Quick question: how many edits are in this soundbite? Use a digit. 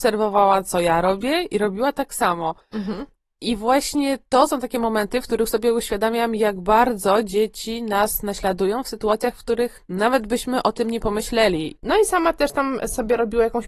1